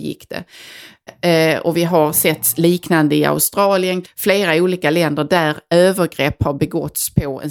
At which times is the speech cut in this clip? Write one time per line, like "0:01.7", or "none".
0:01.1
0:04.0